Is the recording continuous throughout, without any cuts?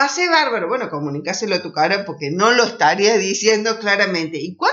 yes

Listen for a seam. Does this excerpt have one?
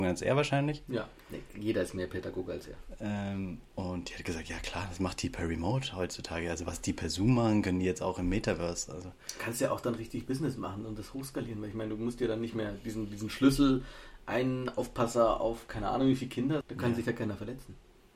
yes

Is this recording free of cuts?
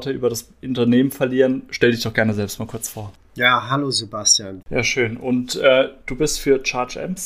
no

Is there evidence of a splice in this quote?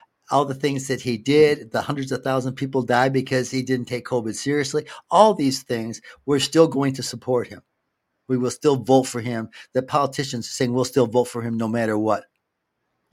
no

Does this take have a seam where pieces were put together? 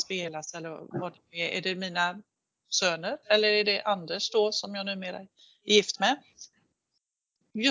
no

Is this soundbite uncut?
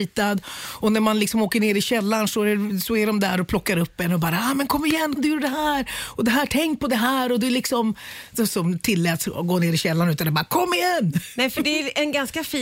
no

